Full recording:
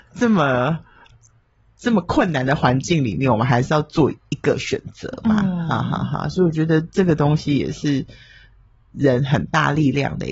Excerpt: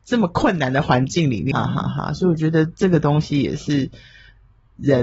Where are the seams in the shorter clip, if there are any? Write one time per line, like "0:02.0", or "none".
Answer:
0:01.5